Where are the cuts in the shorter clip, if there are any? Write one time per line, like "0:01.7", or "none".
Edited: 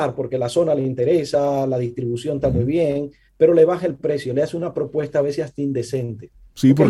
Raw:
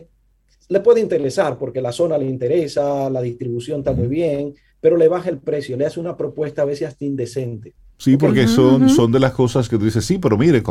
none